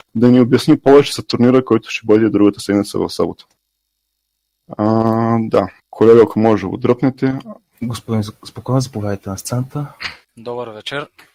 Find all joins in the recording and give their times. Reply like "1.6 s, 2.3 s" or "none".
5.8 s